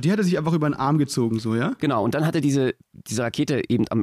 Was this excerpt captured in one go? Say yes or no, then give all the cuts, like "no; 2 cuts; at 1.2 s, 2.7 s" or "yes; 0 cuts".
yes; 0 cuts